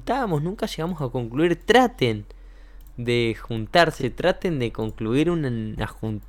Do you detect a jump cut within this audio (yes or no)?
no